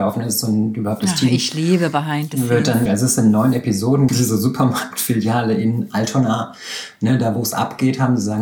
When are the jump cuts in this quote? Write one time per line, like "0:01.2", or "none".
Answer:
0:02.9
0:04.1